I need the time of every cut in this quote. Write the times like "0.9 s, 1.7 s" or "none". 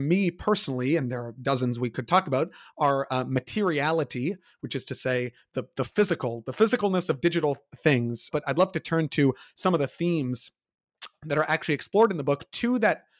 8.3 s